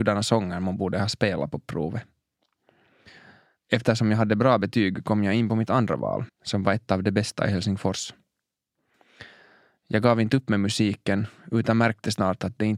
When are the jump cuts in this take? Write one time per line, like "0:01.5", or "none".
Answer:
0:06.3